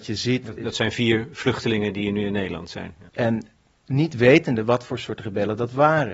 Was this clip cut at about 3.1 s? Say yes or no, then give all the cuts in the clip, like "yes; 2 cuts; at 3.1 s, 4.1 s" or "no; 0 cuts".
yes; 1 cut; at 3.1 s